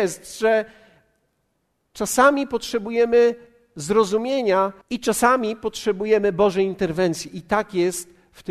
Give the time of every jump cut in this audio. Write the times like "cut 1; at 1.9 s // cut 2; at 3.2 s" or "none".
cut 1; at 4.8 s

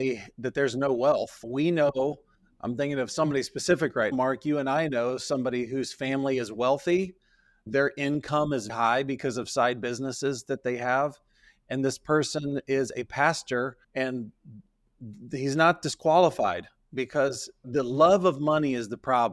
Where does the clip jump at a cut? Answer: cut 1; at 4.1 s // cut 2; at 8.7 s // cut 3; at 13.8 s

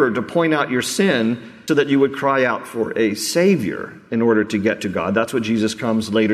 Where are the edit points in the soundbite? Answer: cut 1; at 1.7 s

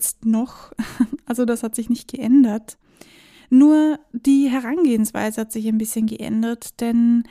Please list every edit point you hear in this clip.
none

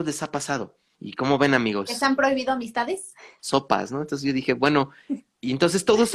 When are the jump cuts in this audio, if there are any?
cut 1; at 0.9 s // cut 2; at 3.4 s

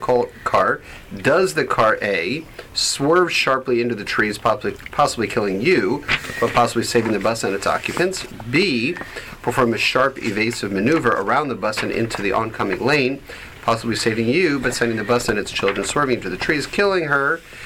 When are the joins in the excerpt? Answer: none

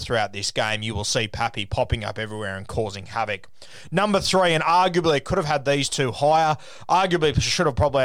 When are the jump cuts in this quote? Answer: none

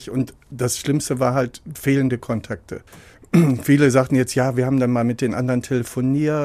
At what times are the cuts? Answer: cut 1; at 2.9 s

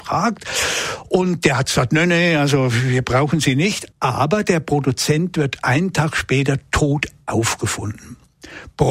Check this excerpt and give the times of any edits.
cut 1; at 3.9 s

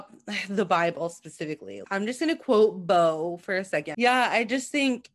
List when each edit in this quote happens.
cut 1; at 1.8 s // cut 2; at 3.9 s

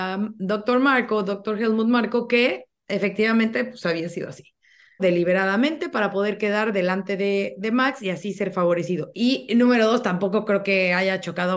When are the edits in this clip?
cut 1; at 5.0 s // cut 2; at 9.1 s

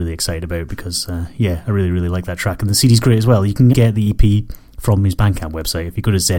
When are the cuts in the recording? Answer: cut 1; at 3.7 s

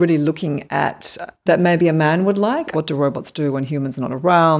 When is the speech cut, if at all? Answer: cut 1; at 1.5 s // cut 2; at 2.7 s

